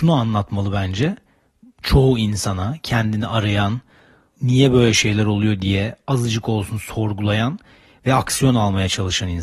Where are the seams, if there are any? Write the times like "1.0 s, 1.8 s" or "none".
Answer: 4.3 s